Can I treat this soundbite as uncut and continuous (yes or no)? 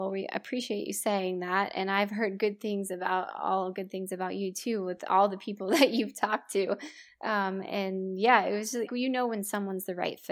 no